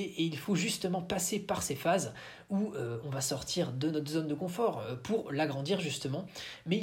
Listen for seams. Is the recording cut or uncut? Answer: uncut